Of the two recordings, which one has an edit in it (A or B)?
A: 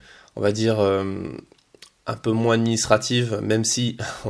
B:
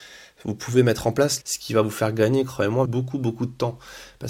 B